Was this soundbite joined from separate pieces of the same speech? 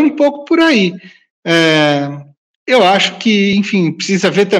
no; 0 cuts

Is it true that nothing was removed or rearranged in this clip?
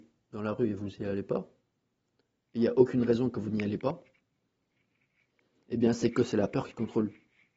yes; 0 cuts

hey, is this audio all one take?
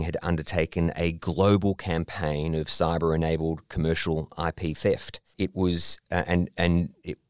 no; 1 cut; at 5.3 s

